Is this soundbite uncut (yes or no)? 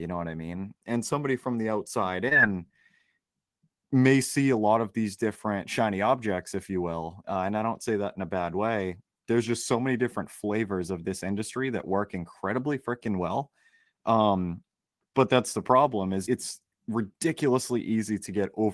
no